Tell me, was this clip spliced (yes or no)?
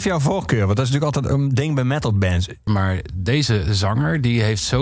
yes